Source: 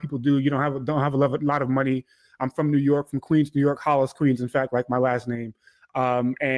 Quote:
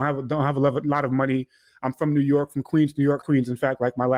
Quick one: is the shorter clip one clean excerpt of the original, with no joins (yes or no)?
no